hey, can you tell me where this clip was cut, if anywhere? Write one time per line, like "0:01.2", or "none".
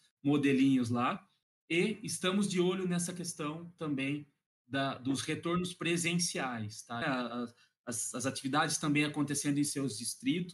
0:07.0